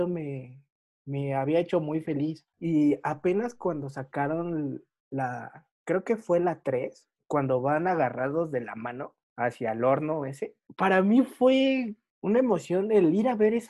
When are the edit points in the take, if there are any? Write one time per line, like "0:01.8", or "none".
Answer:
0:02.5